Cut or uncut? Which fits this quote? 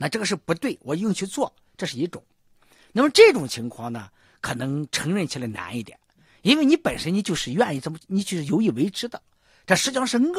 uncut